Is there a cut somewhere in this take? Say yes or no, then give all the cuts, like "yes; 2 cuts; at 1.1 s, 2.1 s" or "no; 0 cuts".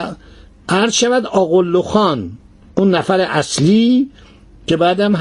no; 0 cuts